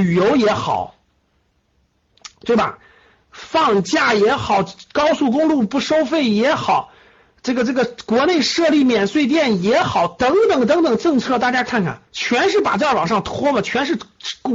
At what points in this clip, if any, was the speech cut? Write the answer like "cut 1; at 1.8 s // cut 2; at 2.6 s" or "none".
cut 1; at 12.1 s